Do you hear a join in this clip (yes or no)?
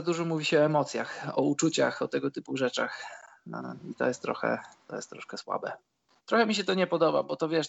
yes